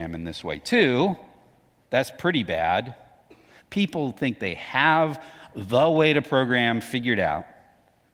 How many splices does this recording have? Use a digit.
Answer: 1